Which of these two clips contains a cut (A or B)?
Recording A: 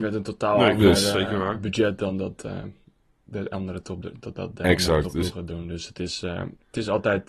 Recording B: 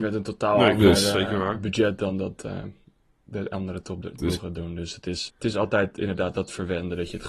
B